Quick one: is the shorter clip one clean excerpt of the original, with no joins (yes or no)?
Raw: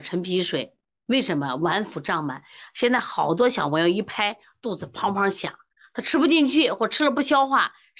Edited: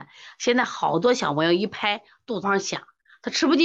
no